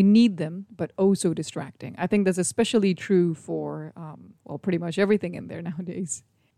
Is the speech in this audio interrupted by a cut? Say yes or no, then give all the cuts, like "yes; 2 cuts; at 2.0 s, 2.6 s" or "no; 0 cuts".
yes; 1 cut; at 4.4 s